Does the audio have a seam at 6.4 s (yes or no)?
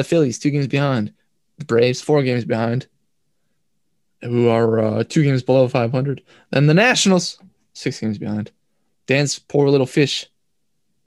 no